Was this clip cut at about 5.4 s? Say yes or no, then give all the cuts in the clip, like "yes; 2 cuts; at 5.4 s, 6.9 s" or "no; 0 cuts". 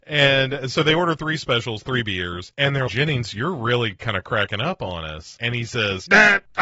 no; 1 cut; at 2.9 s